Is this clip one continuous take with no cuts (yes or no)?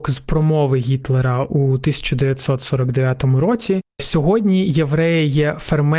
yes